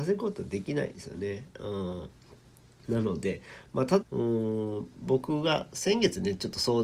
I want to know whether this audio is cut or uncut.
cut